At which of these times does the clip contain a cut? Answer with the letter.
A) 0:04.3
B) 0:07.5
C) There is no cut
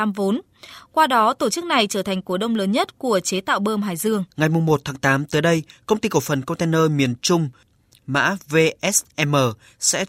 A